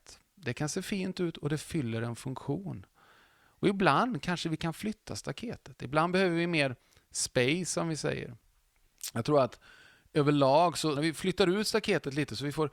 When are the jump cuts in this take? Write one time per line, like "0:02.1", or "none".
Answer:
0:11.0